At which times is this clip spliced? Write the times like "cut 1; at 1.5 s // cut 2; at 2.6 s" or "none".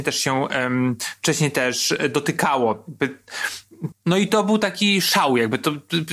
cut 1; at 3.9 s